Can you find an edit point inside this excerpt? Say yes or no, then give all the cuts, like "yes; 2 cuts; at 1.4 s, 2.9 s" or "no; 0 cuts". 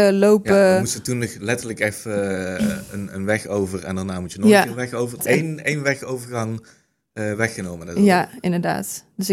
yes; 1 cut; at 5.2 s